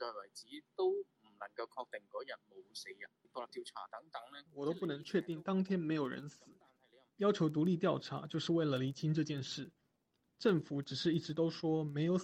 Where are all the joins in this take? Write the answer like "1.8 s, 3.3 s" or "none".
4.5 s

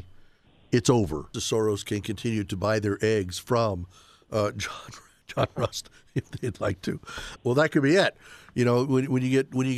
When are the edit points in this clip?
1.3 s, 7.4 s

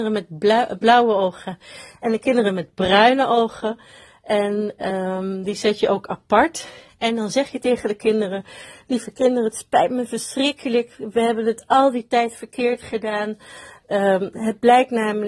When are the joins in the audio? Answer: none

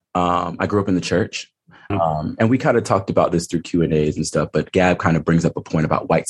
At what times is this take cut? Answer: 1.9 s

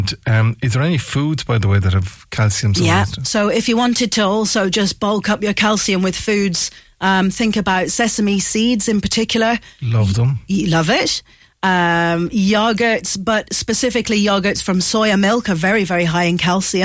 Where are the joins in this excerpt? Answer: none

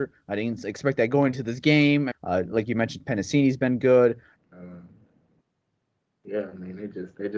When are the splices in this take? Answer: 2.1 s, 4.4 s

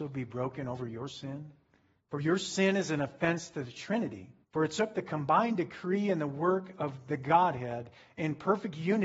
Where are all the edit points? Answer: 2.0 s, 4.4 s

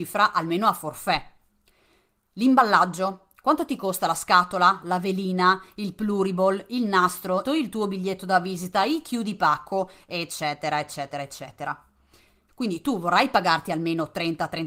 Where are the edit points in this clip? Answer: 7.5 s, 12.5 s

